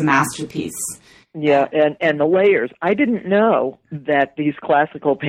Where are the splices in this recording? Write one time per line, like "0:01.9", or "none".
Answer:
none

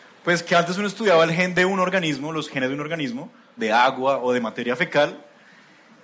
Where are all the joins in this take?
0:03.6

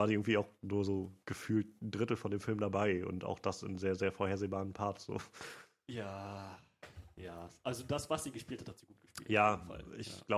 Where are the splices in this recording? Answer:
none

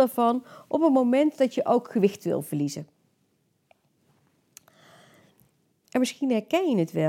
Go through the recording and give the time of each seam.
0:05.8

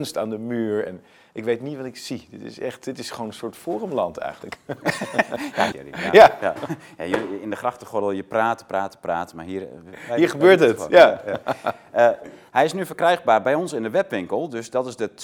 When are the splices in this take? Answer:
0:05.7

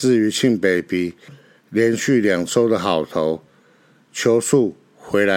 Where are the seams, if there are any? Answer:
none

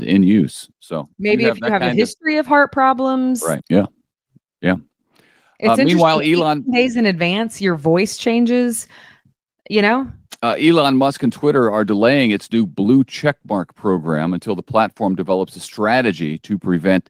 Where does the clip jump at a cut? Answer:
0:03.6
0:10.4

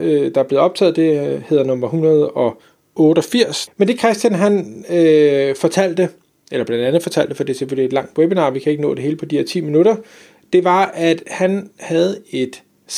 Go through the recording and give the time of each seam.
0:03.7

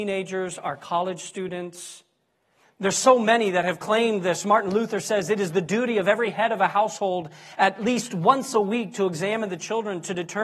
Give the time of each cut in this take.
0:02.6

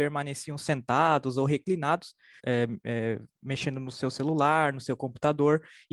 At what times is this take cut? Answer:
0:02.4

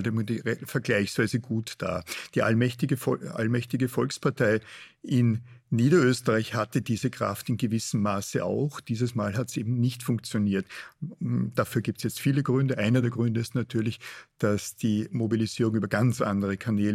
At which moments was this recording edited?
none

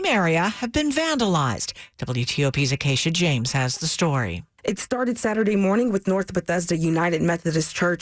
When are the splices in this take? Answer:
0:01.9

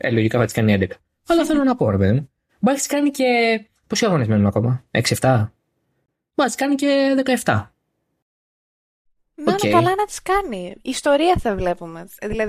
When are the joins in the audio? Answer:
none

